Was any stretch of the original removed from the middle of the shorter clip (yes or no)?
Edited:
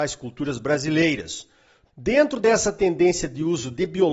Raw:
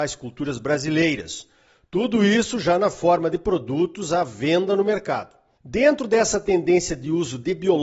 yes